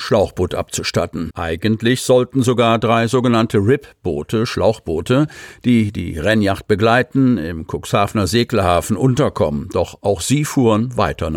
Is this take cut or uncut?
cut